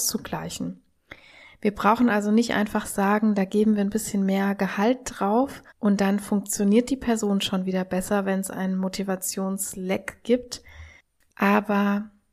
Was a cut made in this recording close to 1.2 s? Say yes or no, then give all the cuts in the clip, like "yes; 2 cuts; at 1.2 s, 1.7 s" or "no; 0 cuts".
no; 2 cuts; at 5.7 s, 11.3 s